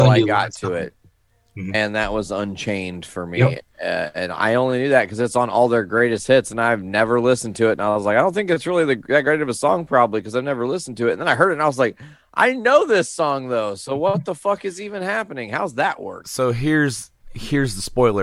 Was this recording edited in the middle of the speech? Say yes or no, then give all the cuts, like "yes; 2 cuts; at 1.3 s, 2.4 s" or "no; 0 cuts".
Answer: yes; 1 cut; at 16.2 s